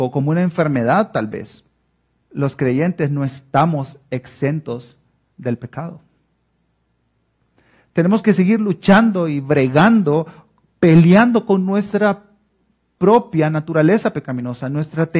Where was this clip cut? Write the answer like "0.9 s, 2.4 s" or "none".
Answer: 2.2 s